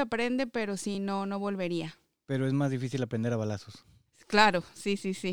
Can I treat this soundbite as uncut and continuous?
yes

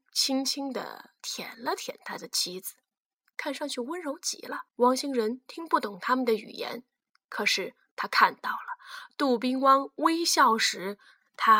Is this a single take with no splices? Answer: no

